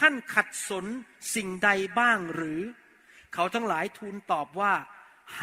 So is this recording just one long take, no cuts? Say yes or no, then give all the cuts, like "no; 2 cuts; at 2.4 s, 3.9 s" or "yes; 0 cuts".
yes; 0 cuts